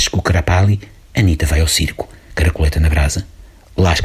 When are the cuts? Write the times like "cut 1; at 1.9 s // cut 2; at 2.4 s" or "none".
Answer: cut 1; at 2.3 s